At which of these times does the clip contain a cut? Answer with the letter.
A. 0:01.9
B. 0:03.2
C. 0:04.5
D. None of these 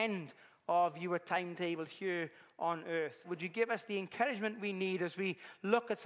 B